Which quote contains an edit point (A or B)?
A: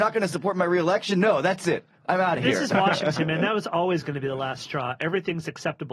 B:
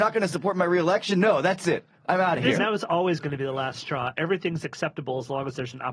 B